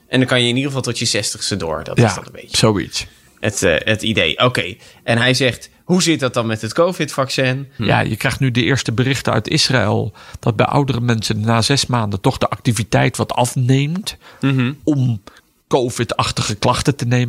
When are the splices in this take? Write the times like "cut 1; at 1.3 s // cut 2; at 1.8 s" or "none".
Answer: cut 1; at 7.8 s